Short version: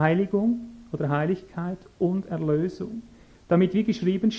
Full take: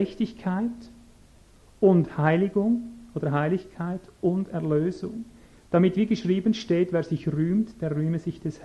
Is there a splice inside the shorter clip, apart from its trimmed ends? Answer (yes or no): no